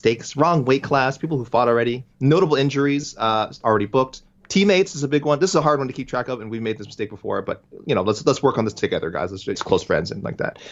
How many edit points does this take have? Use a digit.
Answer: 2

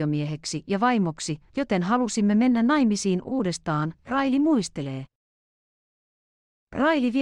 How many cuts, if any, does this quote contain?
1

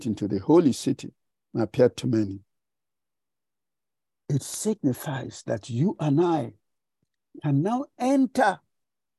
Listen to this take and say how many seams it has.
1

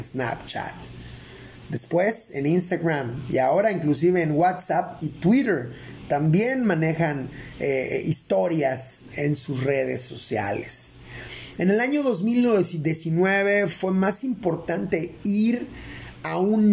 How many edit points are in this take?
1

